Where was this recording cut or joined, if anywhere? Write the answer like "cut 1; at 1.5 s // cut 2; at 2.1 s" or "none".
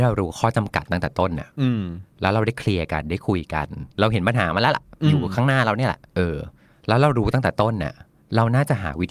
cut 1; at 6.1 s